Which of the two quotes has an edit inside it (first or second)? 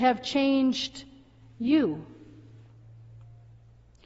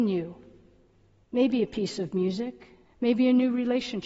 second